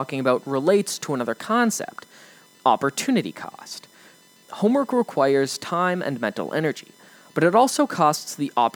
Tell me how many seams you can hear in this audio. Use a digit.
0